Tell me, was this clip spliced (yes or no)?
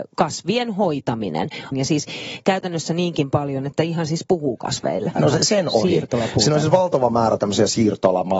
yes